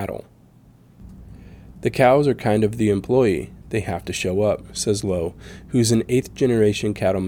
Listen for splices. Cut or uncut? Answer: uncut